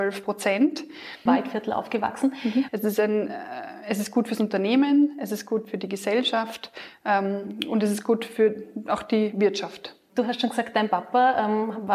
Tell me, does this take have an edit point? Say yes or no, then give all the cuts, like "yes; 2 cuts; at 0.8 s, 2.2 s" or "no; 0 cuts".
yes; 2 cuts; at 1.3 s, 2.7 s